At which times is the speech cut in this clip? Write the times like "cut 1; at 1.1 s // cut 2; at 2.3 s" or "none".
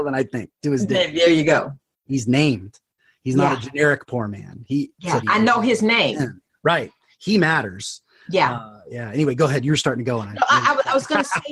cut 1; at 5.2 s

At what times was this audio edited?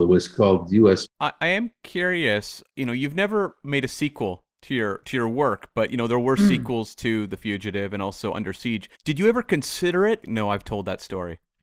cut 1; at 1.0 s // cut 2; at 8.9 s // cut 3; at 10.2 s

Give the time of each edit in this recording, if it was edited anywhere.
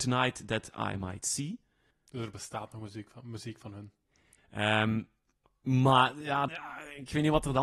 cut 1; at 1.9 s // cut 2; at 4.4 s // cut 3; at 6.5 s

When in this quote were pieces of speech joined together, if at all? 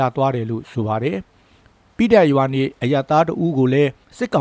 none

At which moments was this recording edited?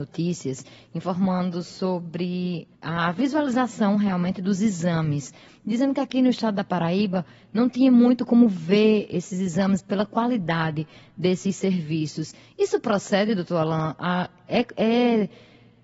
cut 1; at 2.7 s

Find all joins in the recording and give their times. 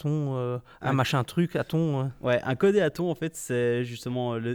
none

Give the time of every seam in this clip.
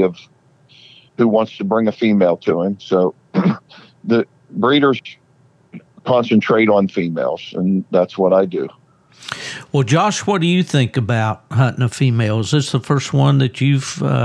none

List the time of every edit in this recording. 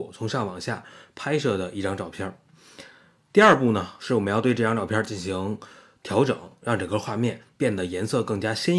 none

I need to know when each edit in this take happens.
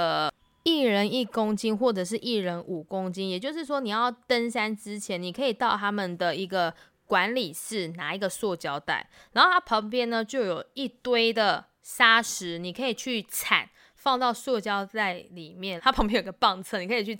cut 1; at 15.8 s

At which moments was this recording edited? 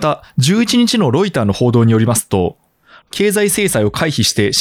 cut 1; at 3.0 s

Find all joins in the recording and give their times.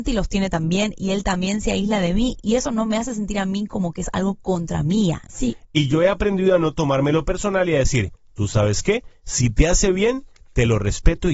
cut 1; at 5.3 s

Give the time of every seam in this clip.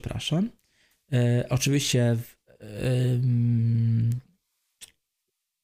none

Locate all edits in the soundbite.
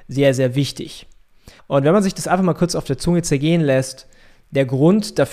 cut 1; at 1.6 s

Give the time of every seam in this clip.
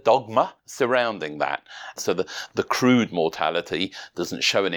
cut 1; at 2.0 s

